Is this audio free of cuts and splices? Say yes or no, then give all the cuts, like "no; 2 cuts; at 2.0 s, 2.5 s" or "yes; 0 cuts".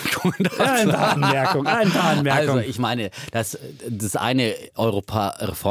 yes; 0 cuts